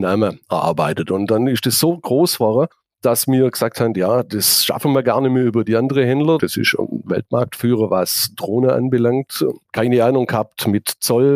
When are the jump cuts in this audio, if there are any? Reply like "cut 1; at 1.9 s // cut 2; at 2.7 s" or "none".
cut 1; at 6.4 s // cut 2; at 9.6 s